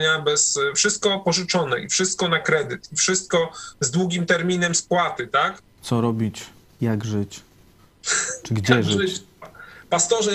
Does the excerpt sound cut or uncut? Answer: cut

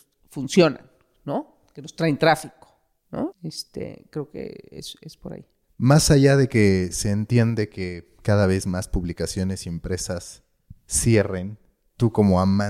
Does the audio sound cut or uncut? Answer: cut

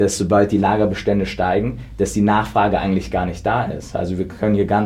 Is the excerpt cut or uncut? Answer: uncut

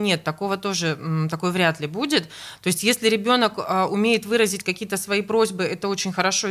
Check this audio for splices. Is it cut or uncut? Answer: uncut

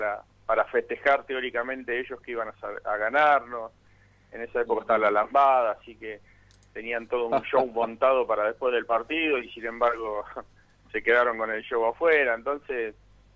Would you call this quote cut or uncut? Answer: uncut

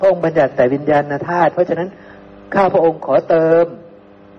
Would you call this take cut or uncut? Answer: uncut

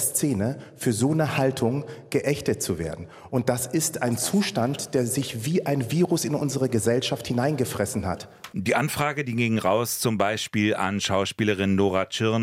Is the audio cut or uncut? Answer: cut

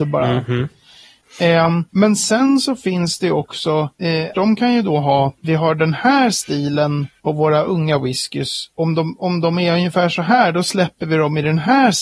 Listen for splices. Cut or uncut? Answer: cut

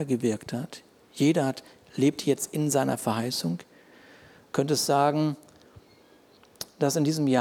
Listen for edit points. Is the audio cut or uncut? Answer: uncut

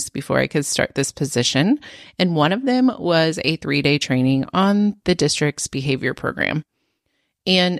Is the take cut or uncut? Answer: uncut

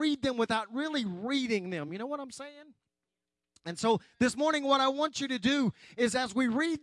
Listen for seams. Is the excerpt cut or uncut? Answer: uncut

